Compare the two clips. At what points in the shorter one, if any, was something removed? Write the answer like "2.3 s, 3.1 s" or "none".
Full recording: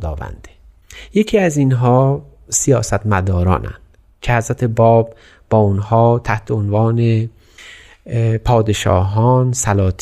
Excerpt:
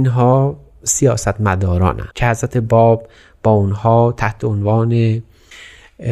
2.1 s